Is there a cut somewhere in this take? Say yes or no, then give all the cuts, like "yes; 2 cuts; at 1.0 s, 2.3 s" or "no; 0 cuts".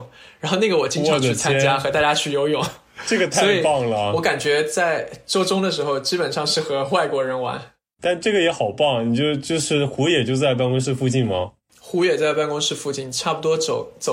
no; 0 cuts